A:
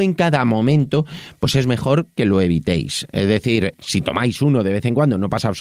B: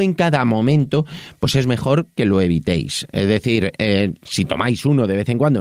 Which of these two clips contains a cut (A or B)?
A